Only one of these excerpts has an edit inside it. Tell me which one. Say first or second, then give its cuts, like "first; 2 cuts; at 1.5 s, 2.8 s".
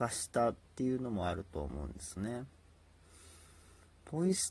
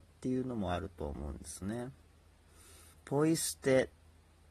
second; 1 cut; at 2.9 s